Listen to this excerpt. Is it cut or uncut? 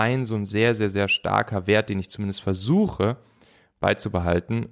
uncut